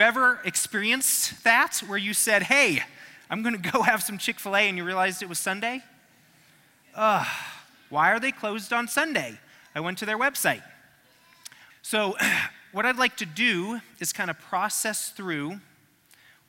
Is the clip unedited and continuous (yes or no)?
no